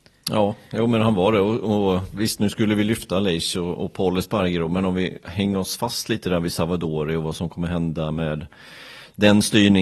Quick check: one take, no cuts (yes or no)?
yes